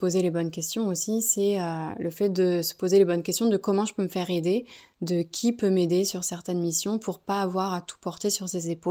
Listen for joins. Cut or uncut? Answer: uncut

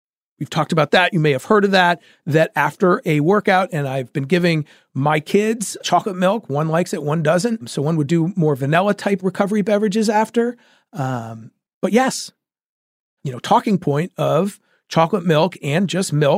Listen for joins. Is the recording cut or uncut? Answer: cut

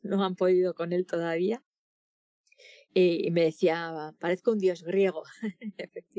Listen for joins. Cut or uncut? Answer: uncut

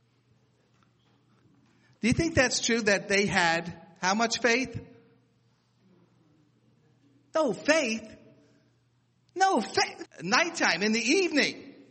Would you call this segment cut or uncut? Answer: cut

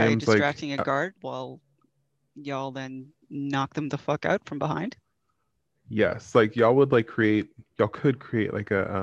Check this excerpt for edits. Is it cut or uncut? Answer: cut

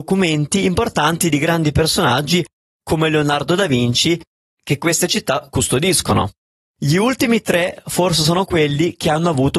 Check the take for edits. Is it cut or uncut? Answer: cut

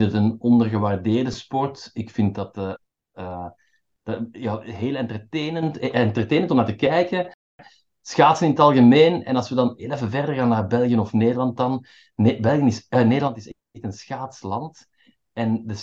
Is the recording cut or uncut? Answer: uncut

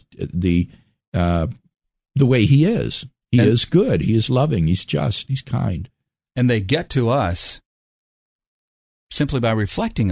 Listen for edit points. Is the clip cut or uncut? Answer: uncut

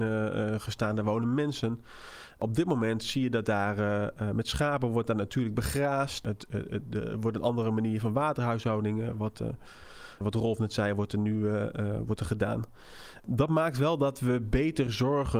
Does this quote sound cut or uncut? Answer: cut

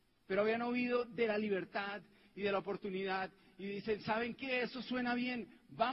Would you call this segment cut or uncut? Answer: uncut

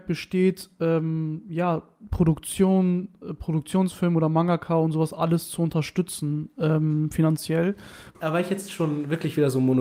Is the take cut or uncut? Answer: cut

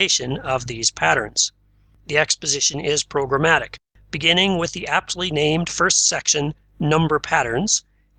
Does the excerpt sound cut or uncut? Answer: uncut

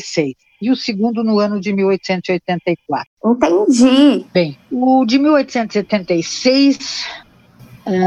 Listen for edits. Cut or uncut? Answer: uncut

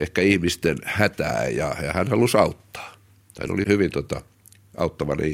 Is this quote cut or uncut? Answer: cut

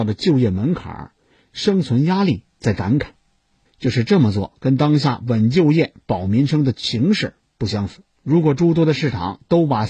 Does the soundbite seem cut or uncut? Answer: cut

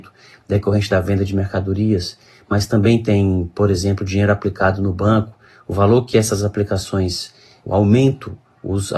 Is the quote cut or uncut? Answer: cut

